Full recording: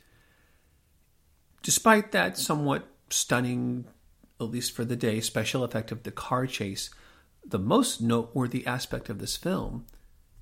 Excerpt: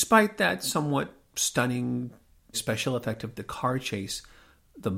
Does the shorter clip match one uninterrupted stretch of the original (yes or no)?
no